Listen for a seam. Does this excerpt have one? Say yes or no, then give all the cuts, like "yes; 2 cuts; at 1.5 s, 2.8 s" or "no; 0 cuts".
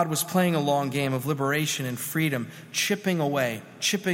no; 0 cuts